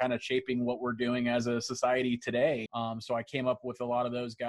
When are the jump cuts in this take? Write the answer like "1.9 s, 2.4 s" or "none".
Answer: 2.7 s